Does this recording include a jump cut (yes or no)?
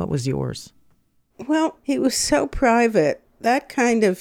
yes